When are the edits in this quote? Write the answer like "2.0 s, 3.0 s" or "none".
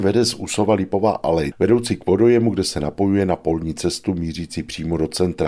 1.5 s

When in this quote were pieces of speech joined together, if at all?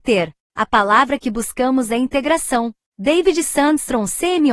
2.9 s

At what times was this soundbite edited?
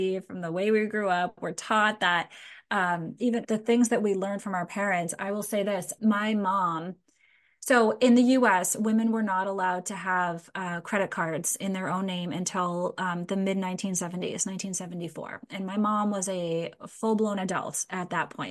3.4 s, 6.0 s

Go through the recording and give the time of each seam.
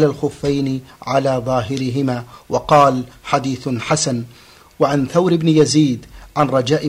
none

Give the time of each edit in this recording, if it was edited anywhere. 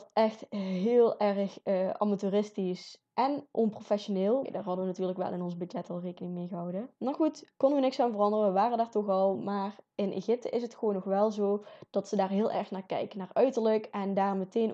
4.4 s, 6.9 s, 9.3 s

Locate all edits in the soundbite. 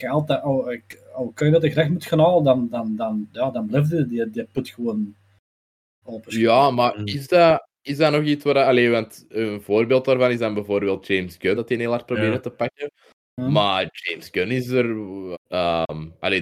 11.6 s, 15.3 s

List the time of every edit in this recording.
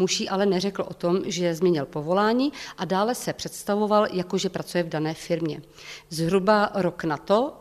6.1 s

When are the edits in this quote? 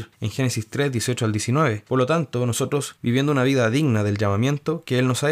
1.9 s, 3.0 s

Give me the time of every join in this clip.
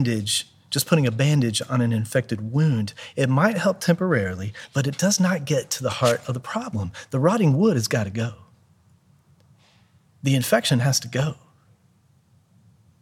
none

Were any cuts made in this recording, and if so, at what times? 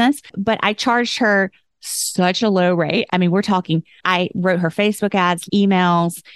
3.1 s, 5.5 s

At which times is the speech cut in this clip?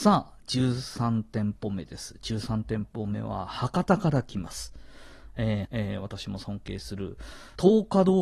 5.6 s

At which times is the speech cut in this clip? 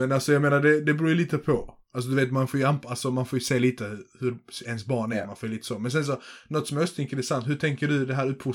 none

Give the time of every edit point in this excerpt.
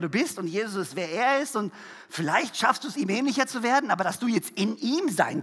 none

